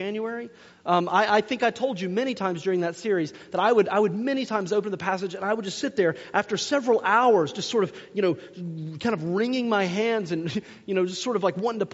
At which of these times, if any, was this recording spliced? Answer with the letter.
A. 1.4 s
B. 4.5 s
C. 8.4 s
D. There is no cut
D